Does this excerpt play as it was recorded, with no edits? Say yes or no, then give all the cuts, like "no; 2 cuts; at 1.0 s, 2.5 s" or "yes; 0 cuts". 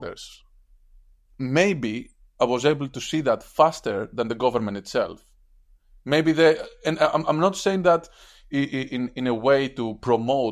yes; 0 cuts